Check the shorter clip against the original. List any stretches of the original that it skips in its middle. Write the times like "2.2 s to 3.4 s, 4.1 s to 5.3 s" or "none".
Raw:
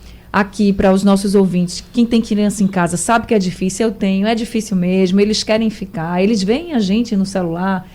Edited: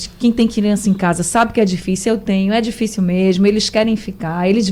none

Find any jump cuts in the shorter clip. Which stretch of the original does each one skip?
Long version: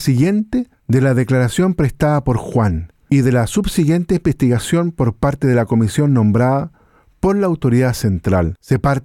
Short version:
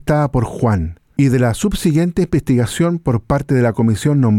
none

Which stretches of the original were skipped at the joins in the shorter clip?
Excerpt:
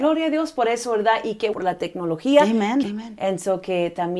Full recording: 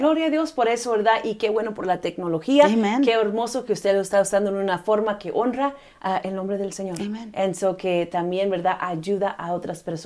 1.5 s to 1.8 s, 3.1 s to 7.0 s

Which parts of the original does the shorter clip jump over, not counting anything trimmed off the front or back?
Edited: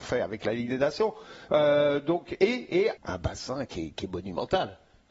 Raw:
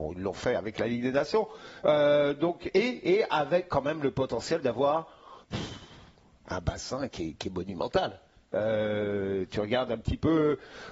3.3 s to 6.4 s

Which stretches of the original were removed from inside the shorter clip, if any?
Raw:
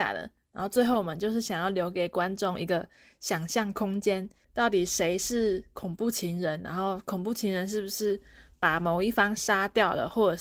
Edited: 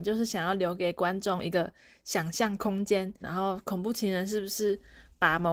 4.4 s to 6.6 s

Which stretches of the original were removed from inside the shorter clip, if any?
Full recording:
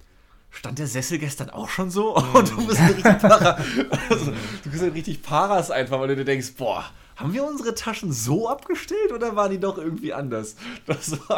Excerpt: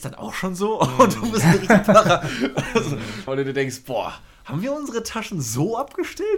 4.6 s to 6.0 s

